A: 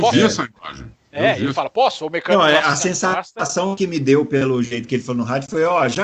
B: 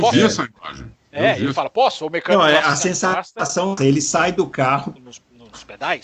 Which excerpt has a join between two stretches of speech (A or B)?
B